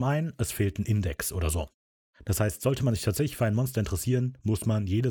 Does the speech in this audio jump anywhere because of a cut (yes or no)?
no